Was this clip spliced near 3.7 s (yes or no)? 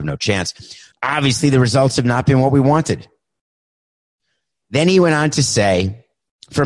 no